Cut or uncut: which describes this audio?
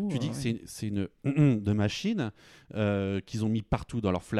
uncut